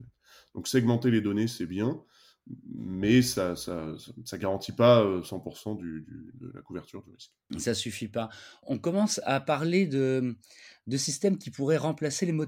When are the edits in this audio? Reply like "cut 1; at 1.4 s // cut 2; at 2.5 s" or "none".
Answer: none